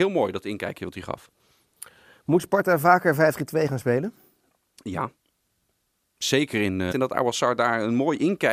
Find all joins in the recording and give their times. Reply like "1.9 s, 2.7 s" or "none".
6.9 s